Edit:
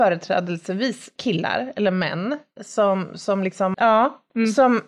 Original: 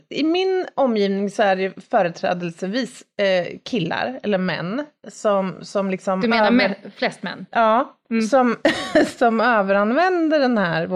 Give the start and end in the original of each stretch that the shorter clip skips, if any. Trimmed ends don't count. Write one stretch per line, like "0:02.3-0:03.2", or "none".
0:03.1-0:03.6
0:06.2-0:07.5